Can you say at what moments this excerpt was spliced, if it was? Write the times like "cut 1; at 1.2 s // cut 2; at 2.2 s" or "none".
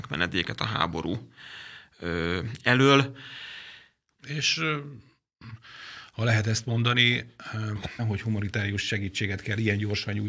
cut 1; at 4.2 s // cut 2; at 8.0 s